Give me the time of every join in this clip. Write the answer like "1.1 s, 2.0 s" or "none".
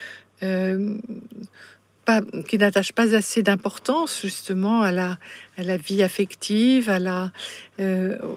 2.0 s